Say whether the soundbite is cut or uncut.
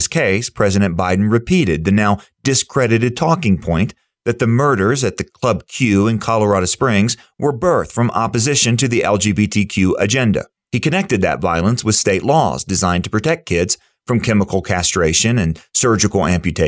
uncut